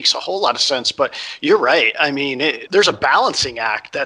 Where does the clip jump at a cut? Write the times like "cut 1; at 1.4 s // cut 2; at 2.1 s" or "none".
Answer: cut 1; at 2.7 s